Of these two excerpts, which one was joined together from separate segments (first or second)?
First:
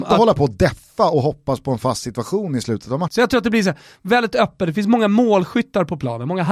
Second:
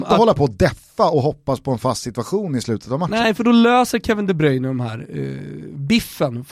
first